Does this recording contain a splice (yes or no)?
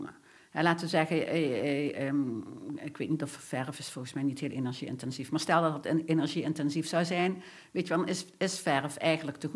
no